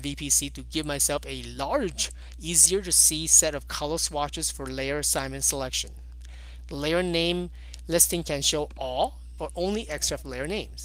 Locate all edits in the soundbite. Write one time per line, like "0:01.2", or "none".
0:06.6
0:09.4